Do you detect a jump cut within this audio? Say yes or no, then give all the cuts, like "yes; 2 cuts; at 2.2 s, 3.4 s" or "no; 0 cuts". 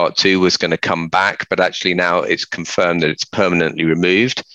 no; 0 cuts